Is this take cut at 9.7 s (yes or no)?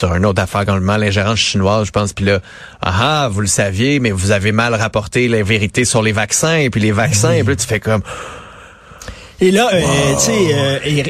yes